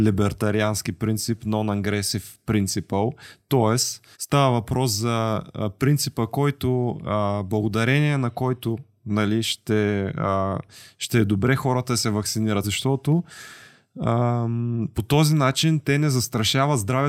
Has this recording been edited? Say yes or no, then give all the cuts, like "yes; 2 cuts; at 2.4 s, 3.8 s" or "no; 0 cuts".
yes; 2 cuts; at 4.1 s, 12.6 s